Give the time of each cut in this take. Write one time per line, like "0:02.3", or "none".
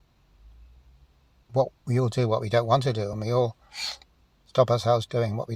none